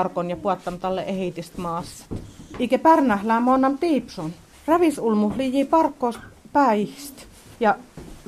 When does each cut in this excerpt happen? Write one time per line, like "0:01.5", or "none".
none